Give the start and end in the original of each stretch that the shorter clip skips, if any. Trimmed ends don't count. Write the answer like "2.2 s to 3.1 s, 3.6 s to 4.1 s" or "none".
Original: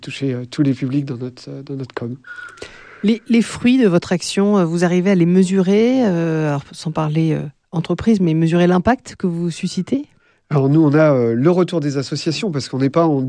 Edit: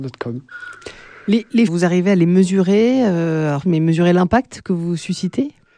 3.4 s to 4.7 s, 6.6 s to 8.2 s

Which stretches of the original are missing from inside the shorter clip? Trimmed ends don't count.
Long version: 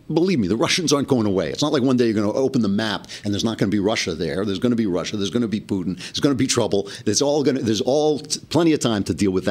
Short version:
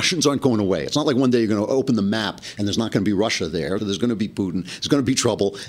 4.4 s to 5.1 s

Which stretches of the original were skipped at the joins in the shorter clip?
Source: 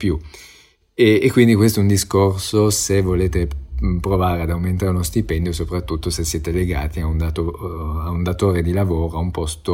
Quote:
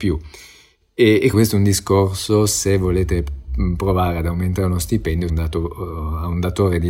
1.3 s to 1.6 s, 5.5 s to 7.1 s

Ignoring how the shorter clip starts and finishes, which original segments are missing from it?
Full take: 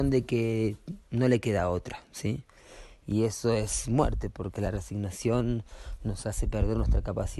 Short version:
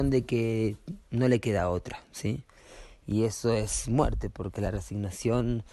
none

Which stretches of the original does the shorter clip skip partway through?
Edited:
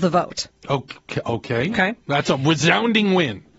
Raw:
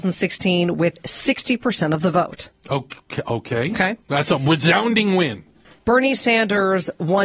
none

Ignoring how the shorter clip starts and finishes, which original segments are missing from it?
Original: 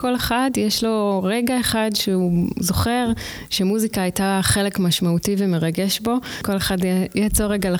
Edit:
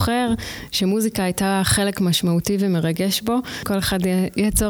none

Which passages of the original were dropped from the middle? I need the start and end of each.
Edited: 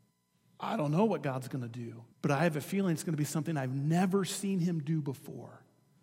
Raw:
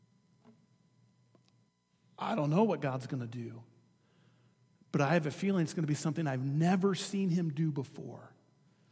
3.7 s to 4.8 s

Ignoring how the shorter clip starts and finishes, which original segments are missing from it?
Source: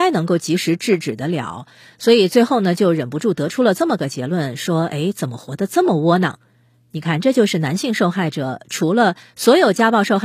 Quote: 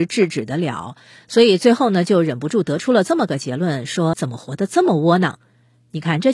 4.8 s to 5.1 s

